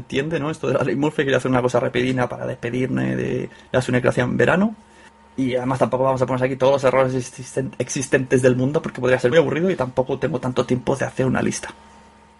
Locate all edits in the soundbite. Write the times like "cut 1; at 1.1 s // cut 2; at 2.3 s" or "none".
cut 1; at 9.3 s